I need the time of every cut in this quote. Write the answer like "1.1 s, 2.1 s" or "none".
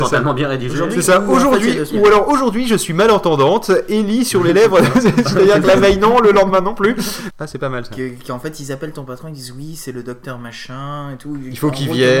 7.3 s